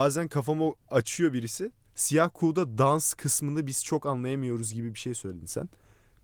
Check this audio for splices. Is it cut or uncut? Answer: cut